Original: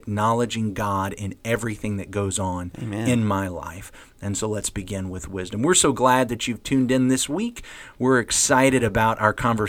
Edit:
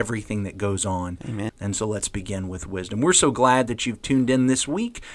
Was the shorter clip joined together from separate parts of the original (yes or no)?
yes